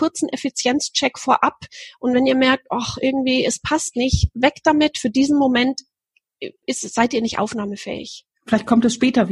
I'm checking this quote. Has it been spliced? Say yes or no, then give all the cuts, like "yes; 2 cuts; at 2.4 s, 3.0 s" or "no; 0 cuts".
yes; 1 cut; at 6.6 s